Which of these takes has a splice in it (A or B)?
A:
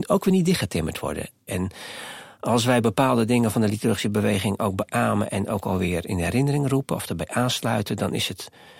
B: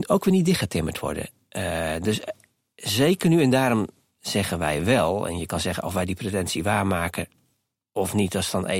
A